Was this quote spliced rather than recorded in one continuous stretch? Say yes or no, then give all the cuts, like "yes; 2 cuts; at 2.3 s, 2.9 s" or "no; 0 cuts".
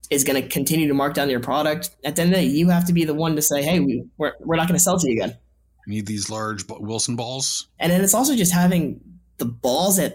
yes; 2 cuts; at 4.1 s, 7.8 s